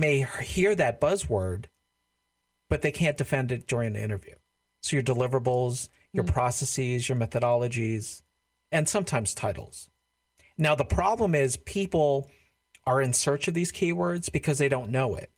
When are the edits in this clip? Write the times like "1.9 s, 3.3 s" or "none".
4.7 s